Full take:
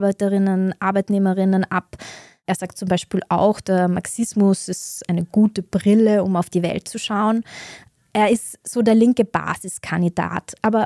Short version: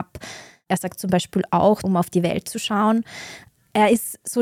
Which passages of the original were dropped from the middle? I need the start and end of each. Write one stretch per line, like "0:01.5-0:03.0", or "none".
0:03.6-0:06.2